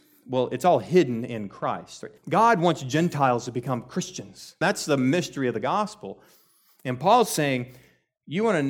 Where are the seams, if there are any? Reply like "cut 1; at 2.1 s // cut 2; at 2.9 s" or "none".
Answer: cut 1; at 2.2 s // cut 2; at 4.6 s